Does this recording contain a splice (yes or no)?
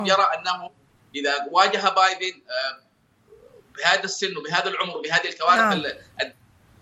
no